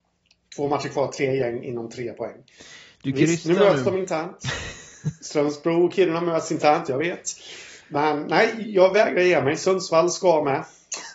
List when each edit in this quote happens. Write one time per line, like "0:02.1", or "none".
none